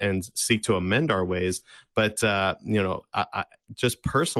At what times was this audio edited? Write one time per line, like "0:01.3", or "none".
none